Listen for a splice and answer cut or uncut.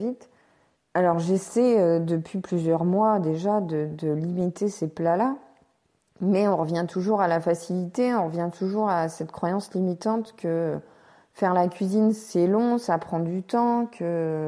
uncut